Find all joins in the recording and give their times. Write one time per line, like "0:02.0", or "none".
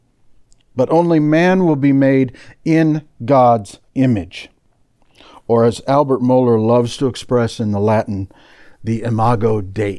none